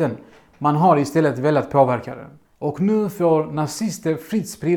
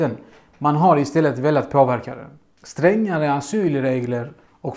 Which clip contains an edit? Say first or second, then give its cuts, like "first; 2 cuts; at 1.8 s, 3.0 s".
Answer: first; 1 cut; at 2.4 s